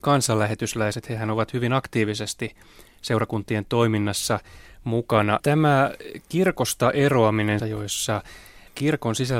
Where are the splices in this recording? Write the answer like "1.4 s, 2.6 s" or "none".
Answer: 5.4 s, 7.6 s